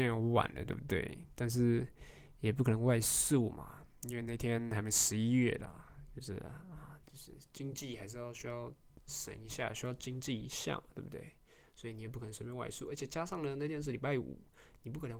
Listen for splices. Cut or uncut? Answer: cut